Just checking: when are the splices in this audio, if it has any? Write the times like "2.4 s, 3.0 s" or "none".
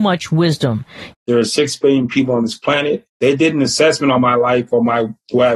1.1 s, 3.1 s